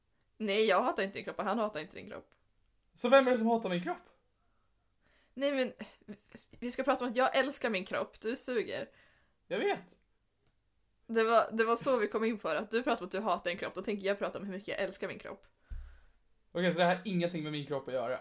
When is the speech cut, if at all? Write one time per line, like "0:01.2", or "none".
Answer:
none